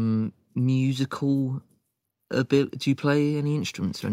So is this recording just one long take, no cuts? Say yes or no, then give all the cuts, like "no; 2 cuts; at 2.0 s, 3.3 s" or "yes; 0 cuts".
yes; 0 cuts